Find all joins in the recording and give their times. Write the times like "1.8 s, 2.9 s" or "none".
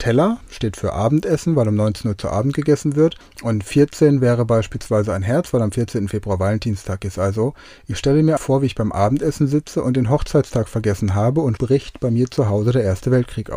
8.4 s, 11.6 s